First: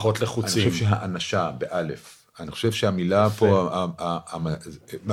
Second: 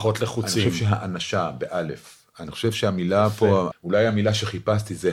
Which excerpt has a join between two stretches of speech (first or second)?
second